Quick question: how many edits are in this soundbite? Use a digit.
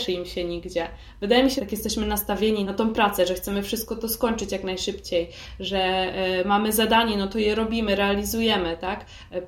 2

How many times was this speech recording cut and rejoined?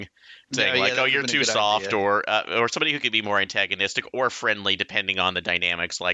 0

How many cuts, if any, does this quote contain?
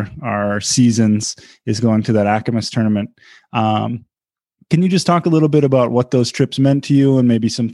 0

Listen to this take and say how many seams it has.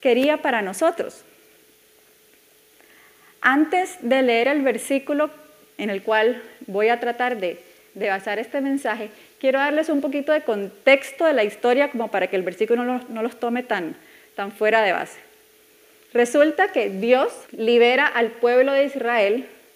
2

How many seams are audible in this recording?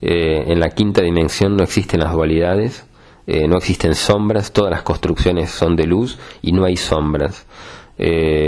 0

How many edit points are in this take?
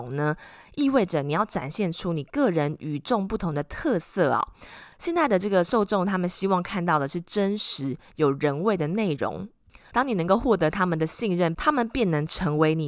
2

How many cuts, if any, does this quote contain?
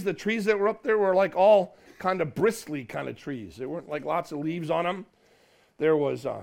0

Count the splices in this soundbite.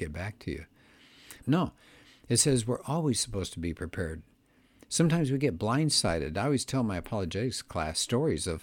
1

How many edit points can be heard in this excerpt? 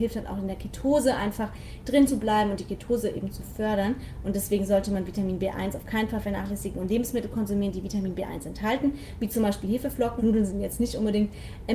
1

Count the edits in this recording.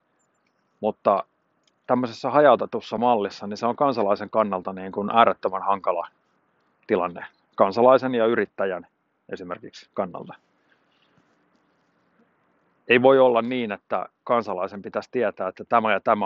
0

